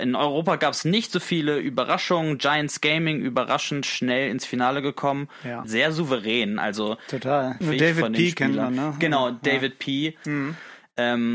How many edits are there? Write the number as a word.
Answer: three